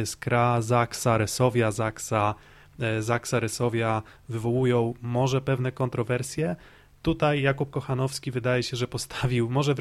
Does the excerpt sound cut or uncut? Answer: uncut